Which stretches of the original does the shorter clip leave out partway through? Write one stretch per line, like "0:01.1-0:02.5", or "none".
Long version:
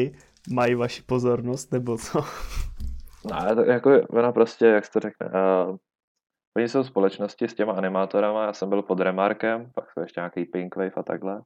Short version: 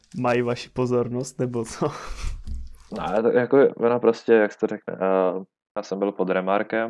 0:06.1-0:08.5